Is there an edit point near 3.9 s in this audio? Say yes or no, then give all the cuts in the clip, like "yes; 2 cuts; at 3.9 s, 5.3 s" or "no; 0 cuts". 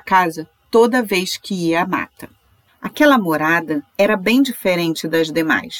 yes; 2 cuts; at 2.7 s, 3.9 s